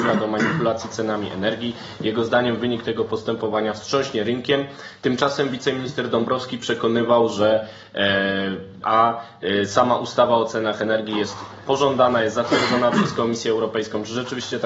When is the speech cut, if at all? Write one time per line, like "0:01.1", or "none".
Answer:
0:08.8